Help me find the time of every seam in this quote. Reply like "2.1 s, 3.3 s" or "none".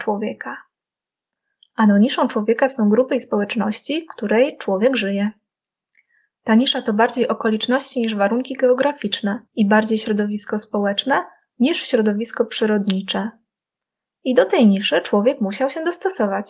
9.5 s